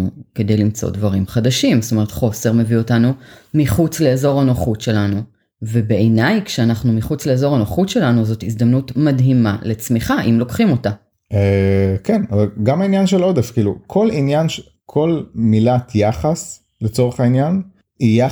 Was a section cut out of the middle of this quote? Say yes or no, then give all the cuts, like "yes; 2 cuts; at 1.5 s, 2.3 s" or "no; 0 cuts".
no; 0 cuts